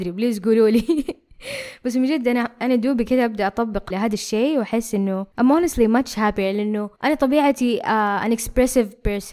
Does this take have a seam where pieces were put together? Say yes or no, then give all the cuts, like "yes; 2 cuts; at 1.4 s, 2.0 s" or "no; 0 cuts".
yes; 2 cuts; at 3.9 s, 5.3 s